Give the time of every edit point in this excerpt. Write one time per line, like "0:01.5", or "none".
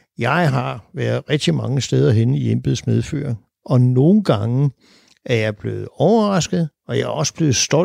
0:06.8